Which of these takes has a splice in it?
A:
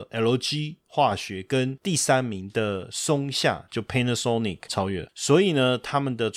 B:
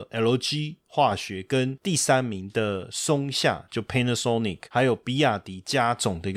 A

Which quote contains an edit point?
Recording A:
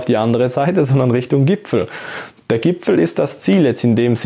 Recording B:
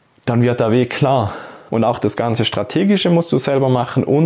B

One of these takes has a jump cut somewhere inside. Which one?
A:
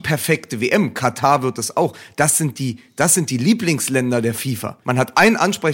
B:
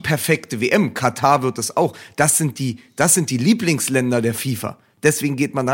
A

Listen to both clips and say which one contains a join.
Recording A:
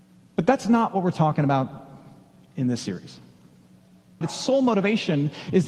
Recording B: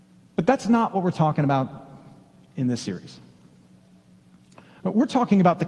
A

